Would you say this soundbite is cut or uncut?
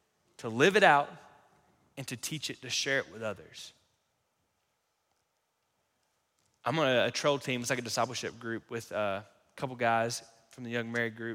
uncut